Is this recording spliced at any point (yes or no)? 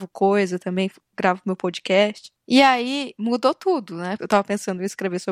yes